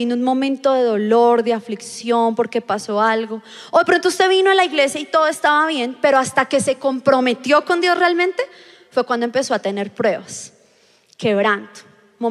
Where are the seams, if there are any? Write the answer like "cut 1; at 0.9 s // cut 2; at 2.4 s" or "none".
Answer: none